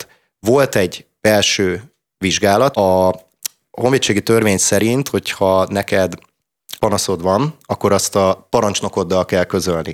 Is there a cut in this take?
yes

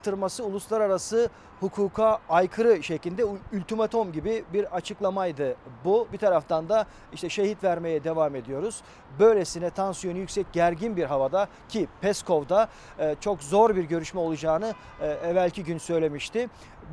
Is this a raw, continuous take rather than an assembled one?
yes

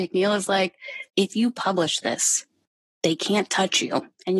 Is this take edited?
yes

